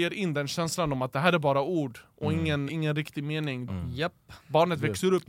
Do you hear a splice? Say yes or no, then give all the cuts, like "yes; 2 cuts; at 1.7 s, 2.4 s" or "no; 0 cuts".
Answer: yes; 2 cuts; at 2.7 s, 3.7 s